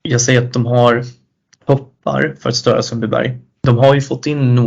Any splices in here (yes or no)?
yes